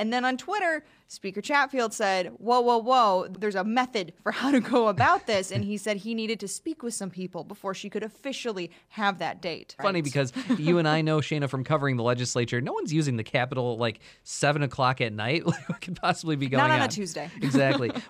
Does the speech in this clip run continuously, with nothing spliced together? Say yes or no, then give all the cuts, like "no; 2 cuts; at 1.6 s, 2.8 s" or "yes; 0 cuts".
no; 1 cut; at 9.8 s